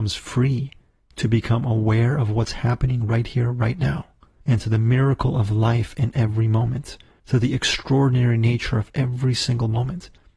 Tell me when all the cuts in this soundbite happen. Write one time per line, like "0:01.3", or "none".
none

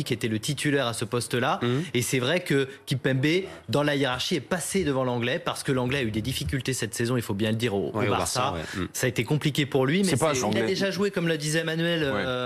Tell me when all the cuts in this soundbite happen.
0:10.4

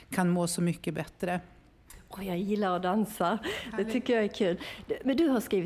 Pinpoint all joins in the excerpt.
none

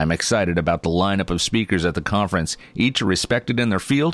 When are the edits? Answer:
none

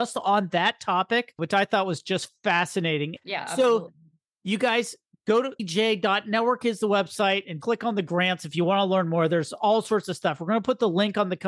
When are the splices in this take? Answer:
0:03.2
0:07.6

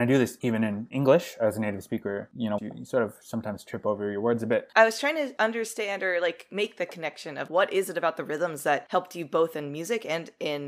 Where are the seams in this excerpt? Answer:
0:02.6
0:04.7
0:07.5

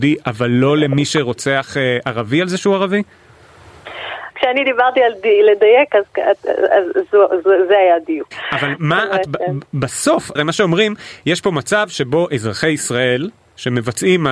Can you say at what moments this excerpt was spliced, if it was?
0:04.3
0:08.3
0:10.4

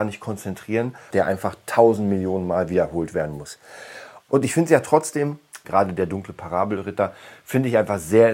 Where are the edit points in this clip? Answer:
0:01.1
0:04.3
0:05.6

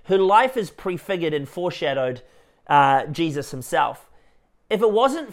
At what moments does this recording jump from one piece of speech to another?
none

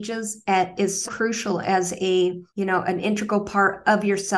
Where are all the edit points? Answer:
0:01.1
0:02.5

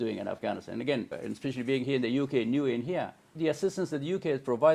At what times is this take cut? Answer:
0:01.1
0:03.4

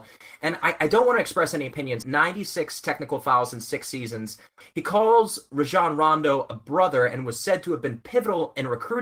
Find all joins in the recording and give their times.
0:02.0
0:04.6

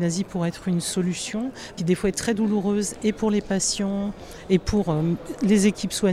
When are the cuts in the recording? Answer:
0:01.8

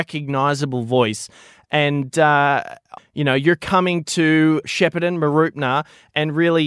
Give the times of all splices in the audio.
0:03.0
0:04.6

